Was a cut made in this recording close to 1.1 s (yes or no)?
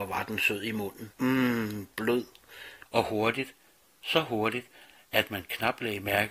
yes